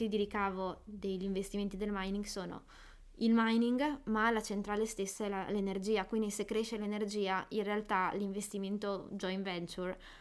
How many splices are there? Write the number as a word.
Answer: zero